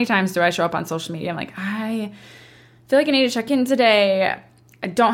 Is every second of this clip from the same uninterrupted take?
yes; 0 cuts

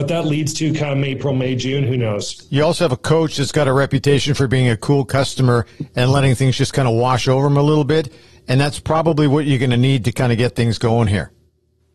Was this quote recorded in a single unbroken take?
yes; 0 cuts

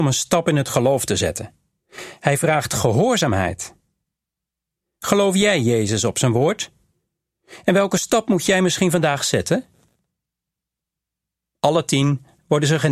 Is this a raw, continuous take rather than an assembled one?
yes; 0 cuts

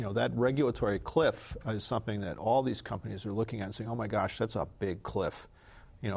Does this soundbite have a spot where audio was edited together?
no; 0 cuts

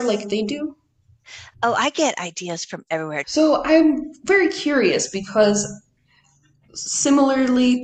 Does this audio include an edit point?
yes; 1 cut; at 3.2 s

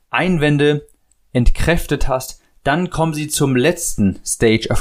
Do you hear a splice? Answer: no; 0 cuts

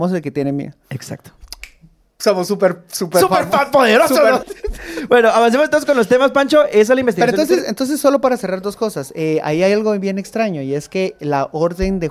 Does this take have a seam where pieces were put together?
yes; 1 cut; at 4.4 s

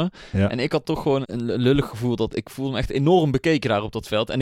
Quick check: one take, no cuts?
no; 1 cut; at 1.2 s

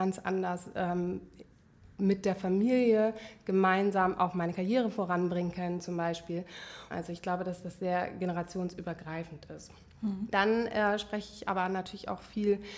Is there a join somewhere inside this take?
yes; 2 cuts; at 6.9 s, 10.3 s

